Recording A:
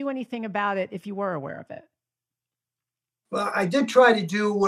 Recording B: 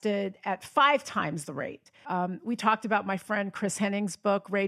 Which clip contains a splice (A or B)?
B